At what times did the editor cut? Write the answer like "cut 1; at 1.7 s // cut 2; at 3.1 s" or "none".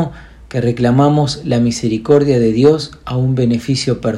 none